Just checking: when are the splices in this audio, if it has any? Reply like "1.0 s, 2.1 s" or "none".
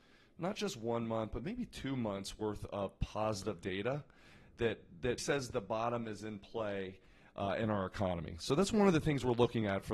5.2 s